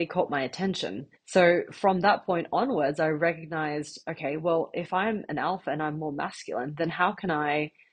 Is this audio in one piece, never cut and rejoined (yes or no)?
no